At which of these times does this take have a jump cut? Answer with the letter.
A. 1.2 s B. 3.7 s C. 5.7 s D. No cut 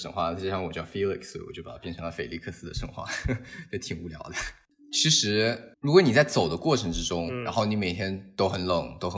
C